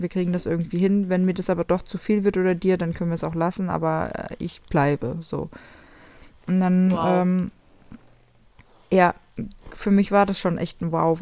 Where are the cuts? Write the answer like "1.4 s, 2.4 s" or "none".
none